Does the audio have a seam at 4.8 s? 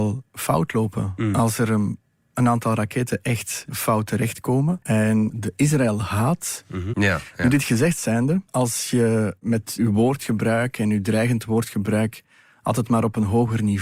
yes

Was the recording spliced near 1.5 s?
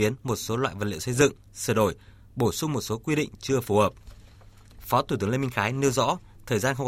yes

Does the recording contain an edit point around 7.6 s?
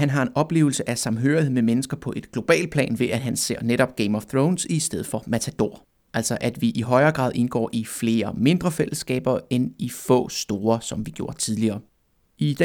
no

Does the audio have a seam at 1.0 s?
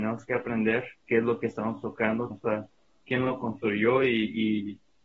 yes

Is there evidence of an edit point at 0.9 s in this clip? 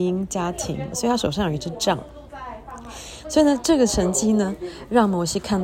yes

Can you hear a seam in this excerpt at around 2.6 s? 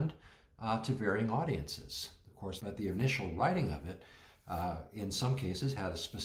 yes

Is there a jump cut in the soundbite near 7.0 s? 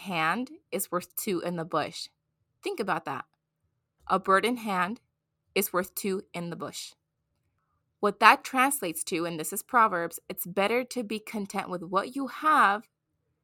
no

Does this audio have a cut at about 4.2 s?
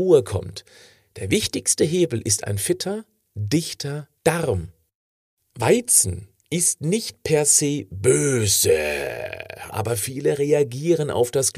yes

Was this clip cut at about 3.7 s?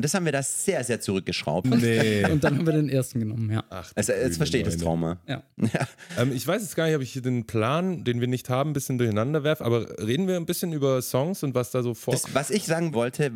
no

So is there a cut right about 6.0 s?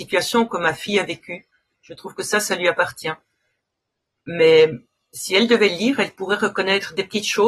no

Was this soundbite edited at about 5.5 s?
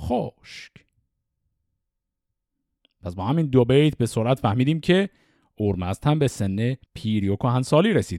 no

